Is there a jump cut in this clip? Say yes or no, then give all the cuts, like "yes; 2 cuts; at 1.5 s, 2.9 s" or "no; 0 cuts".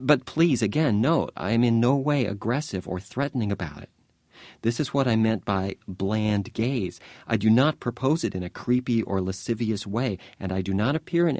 no; 0 cuts